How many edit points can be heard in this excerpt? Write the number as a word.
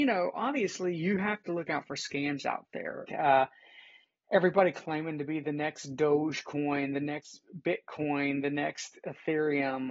one